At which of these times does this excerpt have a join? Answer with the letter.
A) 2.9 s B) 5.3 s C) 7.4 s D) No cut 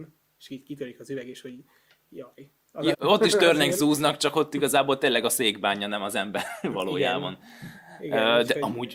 A